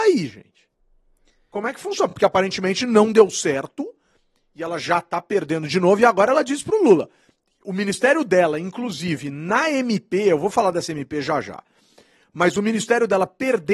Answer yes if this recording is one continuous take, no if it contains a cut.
yes